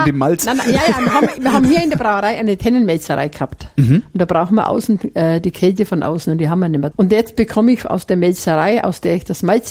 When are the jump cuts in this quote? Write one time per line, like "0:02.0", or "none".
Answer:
0:06.9